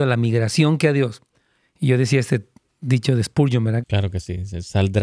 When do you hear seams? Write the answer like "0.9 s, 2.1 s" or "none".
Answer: 3.8 s